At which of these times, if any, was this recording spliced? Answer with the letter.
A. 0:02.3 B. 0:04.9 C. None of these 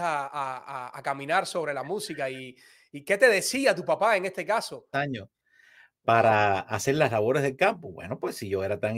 B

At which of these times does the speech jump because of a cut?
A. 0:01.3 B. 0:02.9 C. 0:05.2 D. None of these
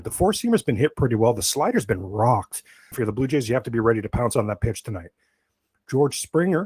B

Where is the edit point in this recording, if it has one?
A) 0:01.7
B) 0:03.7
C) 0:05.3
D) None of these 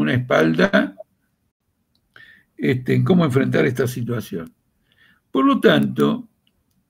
D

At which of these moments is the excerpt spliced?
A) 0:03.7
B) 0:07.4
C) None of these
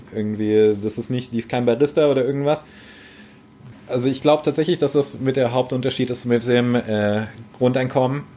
A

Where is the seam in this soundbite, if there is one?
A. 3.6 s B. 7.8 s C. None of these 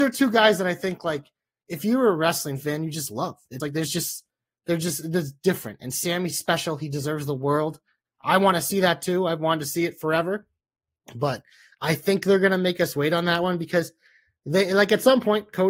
A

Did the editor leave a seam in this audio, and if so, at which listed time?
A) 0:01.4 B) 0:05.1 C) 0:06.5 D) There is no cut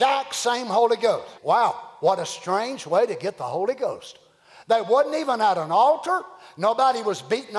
A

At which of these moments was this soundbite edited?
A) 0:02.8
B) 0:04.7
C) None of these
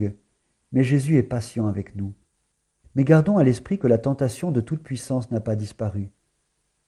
A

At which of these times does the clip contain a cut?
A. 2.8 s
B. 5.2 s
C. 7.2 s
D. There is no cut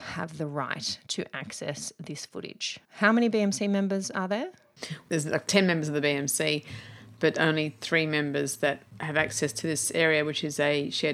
A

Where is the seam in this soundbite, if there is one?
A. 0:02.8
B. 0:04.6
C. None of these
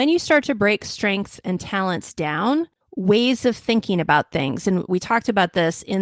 A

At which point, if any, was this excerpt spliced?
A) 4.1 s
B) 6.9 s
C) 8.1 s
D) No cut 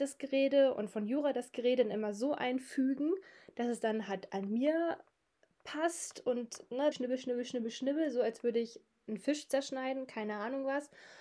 B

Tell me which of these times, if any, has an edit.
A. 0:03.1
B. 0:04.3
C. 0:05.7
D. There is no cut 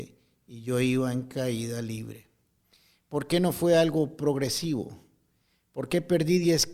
D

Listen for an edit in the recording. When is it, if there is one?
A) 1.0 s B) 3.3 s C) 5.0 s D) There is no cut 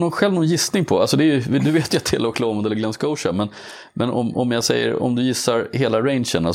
D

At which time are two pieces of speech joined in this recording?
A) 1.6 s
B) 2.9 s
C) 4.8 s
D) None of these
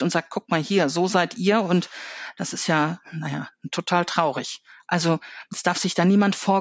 D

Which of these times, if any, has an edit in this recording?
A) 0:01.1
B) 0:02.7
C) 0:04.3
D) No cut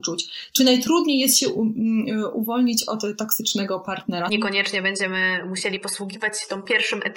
C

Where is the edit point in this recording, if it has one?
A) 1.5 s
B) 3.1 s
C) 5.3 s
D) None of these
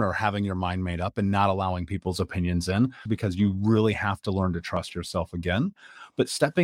B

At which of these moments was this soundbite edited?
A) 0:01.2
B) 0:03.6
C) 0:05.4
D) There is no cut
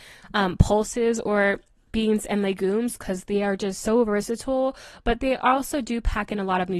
D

